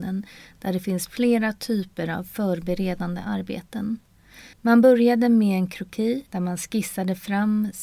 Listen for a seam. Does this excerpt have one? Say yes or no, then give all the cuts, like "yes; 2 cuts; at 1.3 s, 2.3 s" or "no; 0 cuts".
yes; 2 cuts; at 4.5 s, 6.3 s